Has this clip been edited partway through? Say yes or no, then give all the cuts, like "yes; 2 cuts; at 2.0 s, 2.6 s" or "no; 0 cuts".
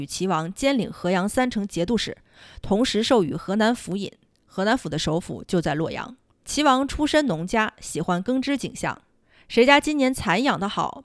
no; 0 cuts